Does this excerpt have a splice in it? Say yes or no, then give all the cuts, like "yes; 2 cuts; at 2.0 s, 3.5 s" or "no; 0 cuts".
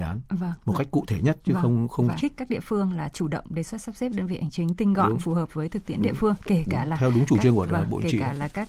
yes; 1 cut; at 2.2 s